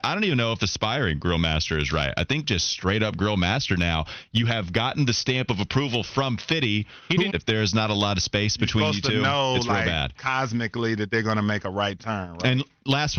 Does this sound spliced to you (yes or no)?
yes